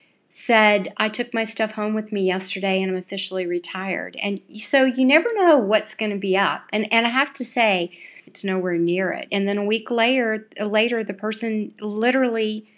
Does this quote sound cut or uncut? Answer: cut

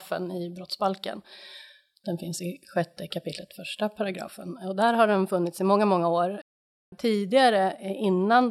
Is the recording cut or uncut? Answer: uncut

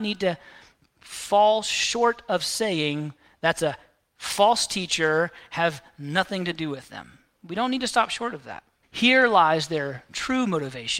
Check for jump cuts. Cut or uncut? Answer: cut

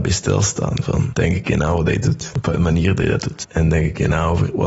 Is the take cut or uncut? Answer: uncut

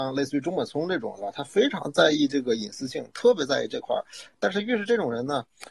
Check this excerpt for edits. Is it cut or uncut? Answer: uncut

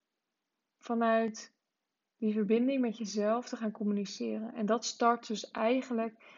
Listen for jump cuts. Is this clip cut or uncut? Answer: uncut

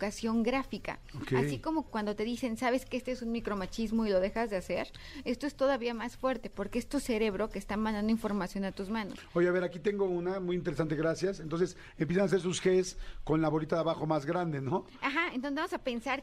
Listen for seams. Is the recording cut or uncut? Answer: cut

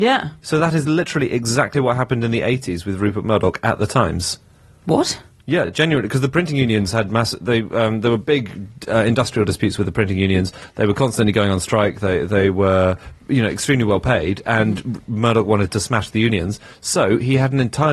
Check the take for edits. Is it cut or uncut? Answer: uncut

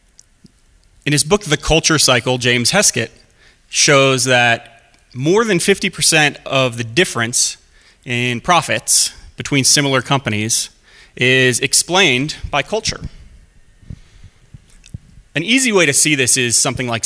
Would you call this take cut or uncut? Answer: uncut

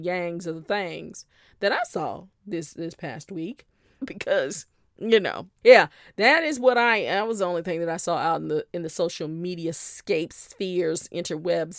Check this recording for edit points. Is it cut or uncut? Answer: cut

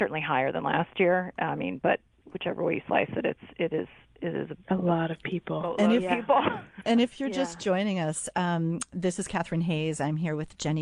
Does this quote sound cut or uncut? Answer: uncut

